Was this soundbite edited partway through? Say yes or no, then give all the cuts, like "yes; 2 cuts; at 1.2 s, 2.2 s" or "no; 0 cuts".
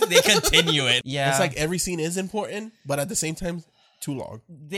yes; 1 cut; at 1.0 s